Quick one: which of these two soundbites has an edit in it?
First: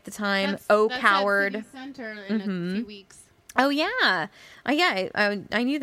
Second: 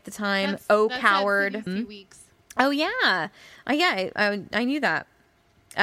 second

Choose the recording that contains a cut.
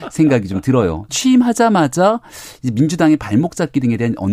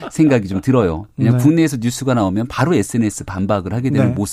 first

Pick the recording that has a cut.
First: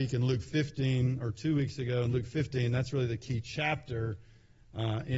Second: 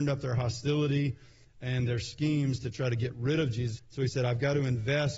second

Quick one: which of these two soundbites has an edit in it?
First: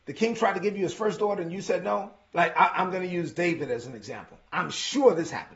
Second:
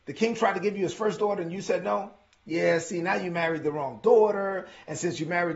first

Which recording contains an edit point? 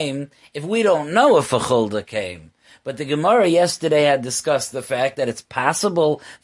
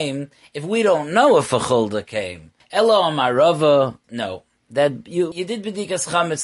second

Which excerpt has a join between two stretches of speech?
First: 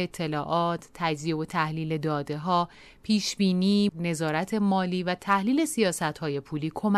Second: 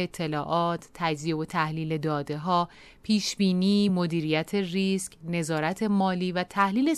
first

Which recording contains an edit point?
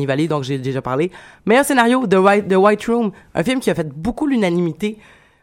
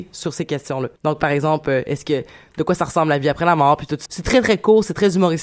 second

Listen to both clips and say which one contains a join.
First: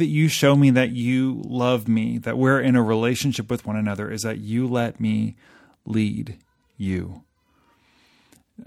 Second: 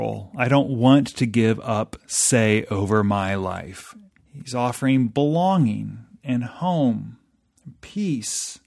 second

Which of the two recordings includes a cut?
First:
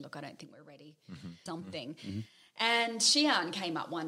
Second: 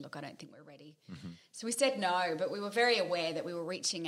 first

